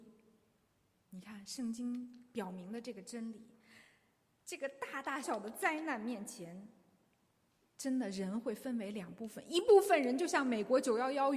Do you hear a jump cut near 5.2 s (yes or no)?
yes